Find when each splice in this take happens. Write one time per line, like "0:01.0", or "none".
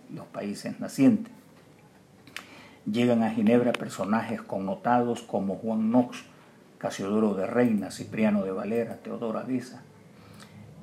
none